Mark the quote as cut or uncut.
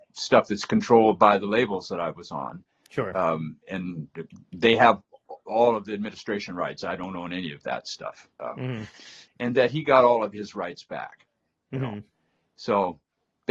cut